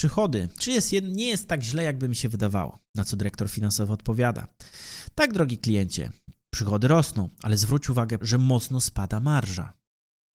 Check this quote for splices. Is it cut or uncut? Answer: cut